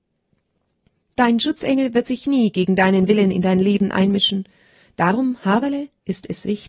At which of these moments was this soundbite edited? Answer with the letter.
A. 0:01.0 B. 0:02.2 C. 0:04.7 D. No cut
D